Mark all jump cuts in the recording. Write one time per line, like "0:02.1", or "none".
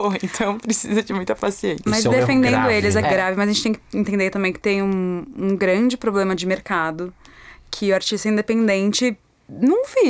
0:03.0